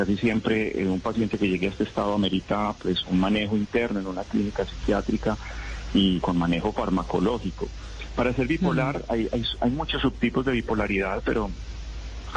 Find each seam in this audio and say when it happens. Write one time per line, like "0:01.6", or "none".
0:03.0
0:06.2